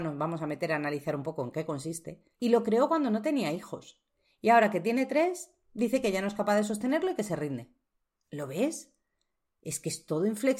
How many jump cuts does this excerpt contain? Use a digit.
1